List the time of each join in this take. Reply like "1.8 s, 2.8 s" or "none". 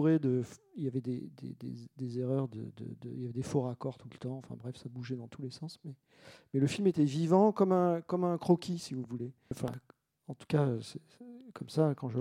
9.5 s